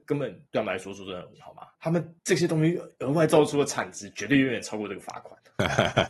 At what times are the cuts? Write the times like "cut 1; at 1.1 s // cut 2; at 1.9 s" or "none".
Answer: cut 1; at 1.4 s